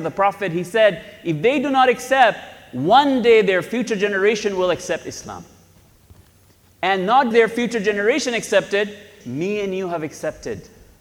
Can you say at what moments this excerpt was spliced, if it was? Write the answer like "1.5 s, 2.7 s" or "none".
7.3 s, 9.2 s